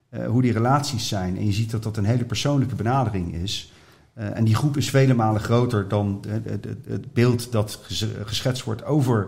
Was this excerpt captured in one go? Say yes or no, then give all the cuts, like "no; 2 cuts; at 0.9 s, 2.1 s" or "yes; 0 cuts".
yes; 0 cuts